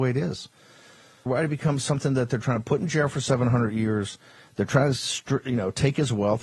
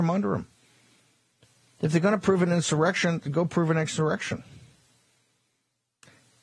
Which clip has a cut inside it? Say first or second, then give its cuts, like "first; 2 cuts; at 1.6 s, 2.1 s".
first; 1 cut; at 1.3 s